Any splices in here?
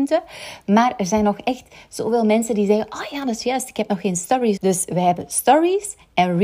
yes; 1 cut; at 4.6 s

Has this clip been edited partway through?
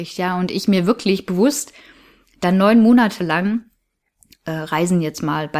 no; 0 cuts

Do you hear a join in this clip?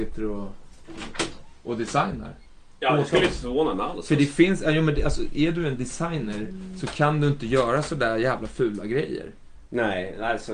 no; 0 cuts

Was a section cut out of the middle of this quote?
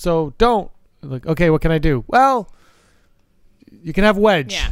no; 0 cuts

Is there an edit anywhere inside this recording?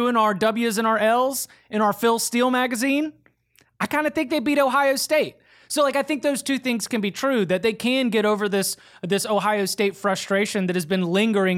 no; 0 cuts

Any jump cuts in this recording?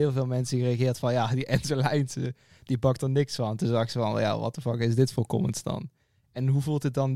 no; 0 cuts

